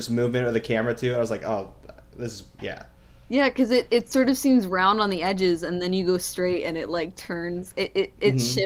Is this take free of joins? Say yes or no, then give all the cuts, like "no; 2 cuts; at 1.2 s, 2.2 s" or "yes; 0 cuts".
yes; 0 cuts